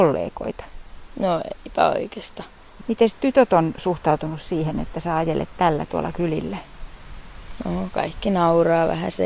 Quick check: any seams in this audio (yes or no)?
yes